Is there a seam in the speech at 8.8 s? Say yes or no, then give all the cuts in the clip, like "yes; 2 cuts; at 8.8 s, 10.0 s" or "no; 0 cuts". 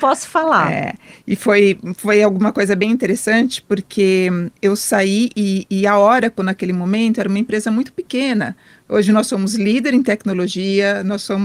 no; 0 cuts